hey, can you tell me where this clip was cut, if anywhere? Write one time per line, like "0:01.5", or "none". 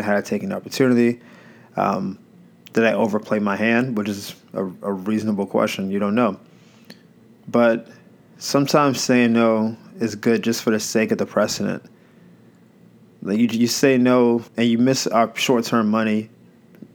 0:14.5